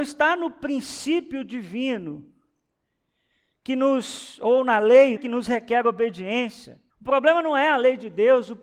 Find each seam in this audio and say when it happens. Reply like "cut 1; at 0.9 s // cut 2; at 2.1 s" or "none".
cut 1; at 5.2 s // cut 2; at 6.9 s